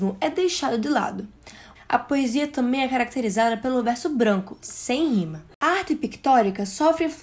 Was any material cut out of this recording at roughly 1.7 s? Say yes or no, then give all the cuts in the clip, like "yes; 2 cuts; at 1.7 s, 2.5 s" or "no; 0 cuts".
yes; 1 cut; at 1.7 s